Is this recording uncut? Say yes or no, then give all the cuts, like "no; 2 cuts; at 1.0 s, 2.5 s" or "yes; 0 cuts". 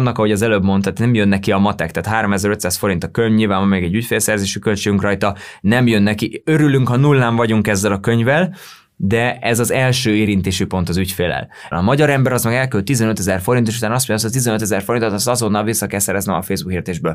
no; 1 cut; at 11.7 s